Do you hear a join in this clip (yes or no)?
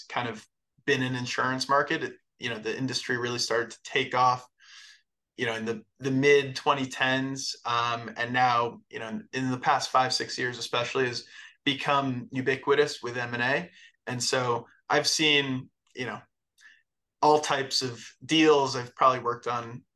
no